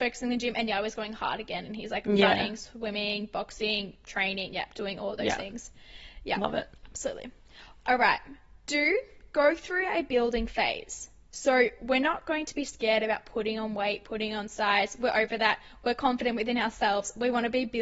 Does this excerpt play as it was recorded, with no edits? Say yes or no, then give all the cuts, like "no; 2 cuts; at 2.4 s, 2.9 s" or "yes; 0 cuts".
yes; 0 cuts